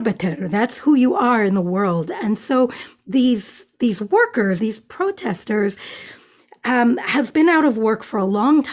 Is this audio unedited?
no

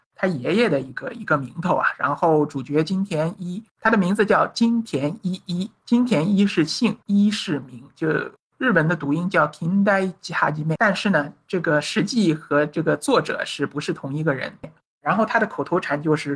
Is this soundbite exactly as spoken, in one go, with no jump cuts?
no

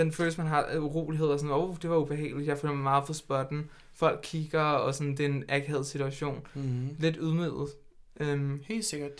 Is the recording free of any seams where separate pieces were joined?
yes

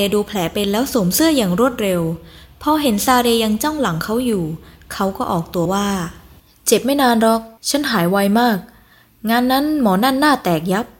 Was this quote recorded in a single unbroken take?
no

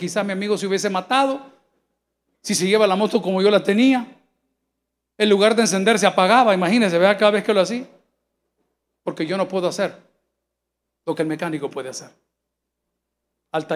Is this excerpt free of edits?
yes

